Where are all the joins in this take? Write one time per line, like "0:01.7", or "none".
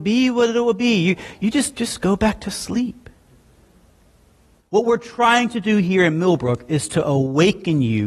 0:01.7